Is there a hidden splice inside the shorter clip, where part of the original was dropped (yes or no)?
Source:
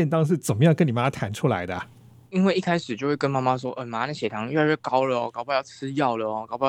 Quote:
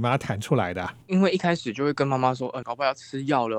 yes